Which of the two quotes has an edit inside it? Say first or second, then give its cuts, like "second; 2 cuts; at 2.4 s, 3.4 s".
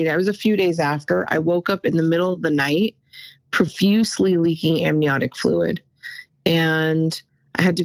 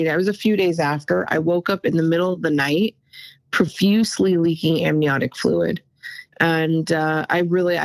second; 1 cut; at 6.3 s